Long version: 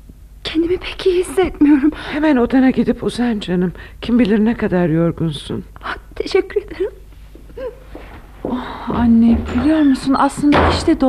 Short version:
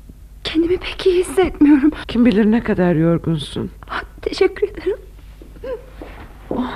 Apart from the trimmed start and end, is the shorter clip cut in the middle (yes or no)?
yes